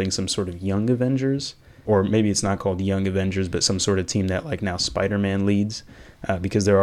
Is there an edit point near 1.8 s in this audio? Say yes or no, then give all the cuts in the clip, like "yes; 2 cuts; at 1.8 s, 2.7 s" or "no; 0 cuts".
yes; 1 cut; at 1.8 s